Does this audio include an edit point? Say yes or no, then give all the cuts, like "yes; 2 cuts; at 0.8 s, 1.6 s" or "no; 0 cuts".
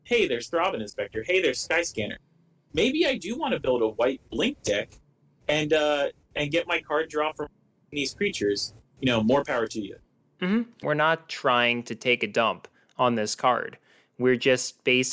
yes; 1 cut; at 10.8 s